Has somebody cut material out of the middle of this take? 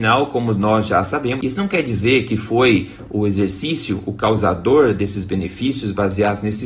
yes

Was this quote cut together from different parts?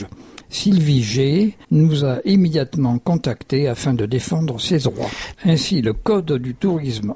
yes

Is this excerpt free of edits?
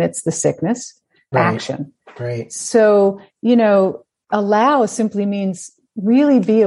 no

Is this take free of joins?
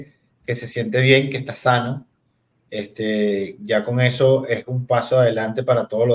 yes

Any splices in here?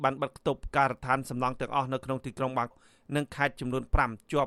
yes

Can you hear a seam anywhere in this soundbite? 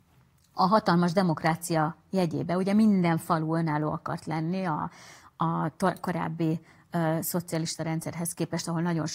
no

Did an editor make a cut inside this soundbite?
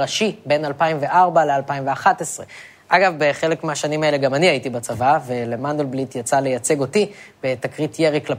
no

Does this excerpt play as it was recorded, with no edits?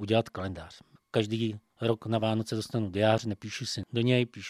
no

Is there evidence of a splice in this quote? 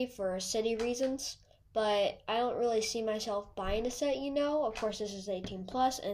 no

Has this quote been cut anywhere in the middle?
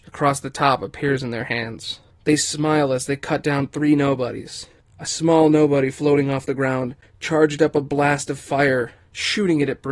no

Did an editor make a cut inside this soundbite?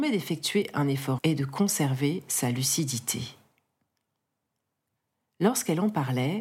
yes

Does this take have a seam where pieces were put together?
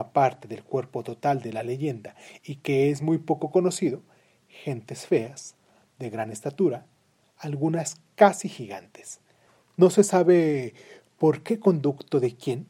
no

